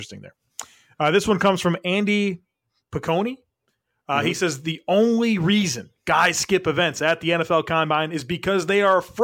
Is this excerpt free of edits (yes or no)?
yes